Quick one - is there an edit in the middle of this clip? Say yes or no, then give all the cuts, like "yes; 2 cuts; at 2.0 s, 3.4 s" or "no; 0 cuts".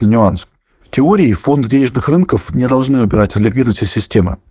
no; 0 cuts